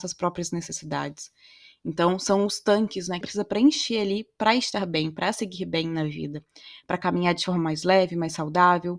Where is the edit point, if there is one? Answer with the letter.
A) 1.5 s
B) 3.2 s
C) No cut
B